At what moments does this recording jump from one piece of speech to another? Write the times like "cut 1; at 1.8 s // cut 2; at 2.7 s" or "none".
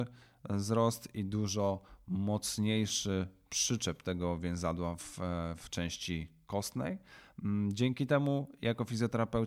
none